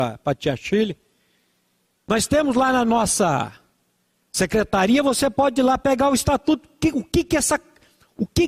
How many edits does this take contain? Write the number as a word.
zero